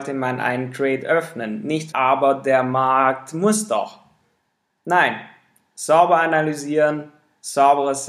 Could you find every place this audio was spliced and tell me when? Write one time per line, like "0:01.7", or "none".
0:01.9